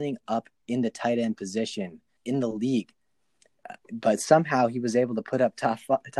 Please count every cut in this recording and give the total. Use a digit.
1